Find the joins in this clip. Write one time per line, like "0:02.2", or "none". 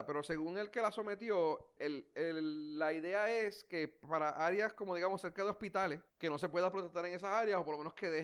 0:01.8
0:06.1